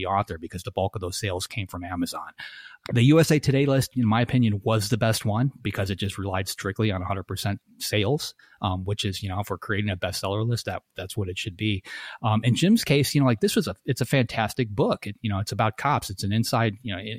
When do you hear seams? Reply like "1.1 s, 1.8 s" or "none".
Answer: none

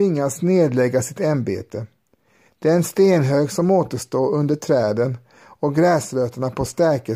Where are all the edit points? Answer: 2.5 s

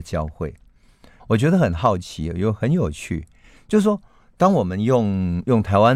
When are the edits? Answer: 1.2 s

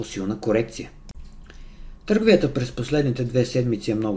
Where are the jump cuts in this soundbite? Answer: none

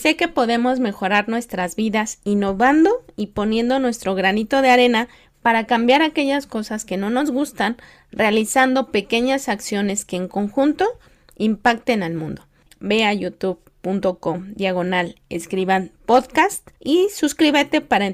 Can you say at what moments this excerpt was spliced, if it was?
12.6 s, 16.7 s

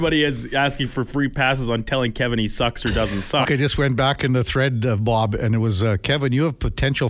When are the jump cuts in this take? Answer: 3.4 s

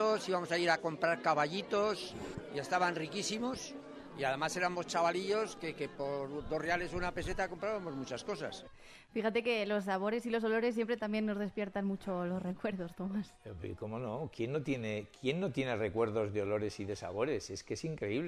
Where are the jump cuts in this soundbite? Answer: none

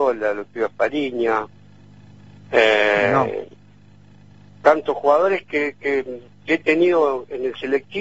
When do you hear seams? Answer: none

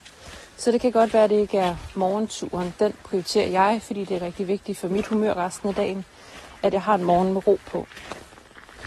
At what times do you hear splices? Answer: none

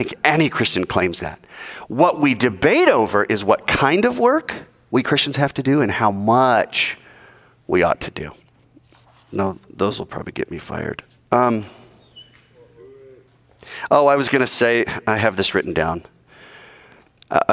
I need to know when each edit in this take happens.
none

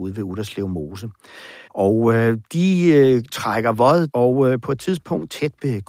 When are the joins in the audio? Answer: 1.7 s, 4.1 s

